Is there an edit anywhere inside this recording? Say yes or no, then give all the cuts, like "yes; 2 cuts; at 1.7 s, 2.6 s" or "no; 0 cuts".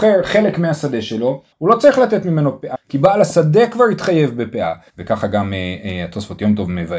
yes; 3 cuts; at 1.5 s, 2.7 s, 4.9 s